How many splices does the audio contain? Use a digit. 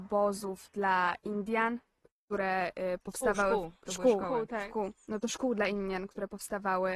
0